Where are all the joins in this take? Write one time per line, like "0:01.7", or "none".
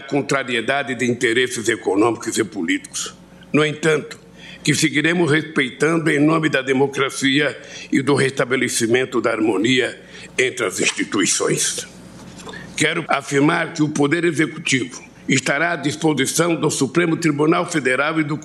0:04.6
0:13.0
0:15.1